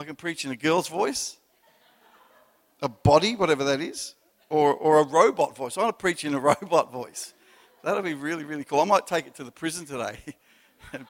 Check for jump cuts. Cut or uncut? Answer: uncut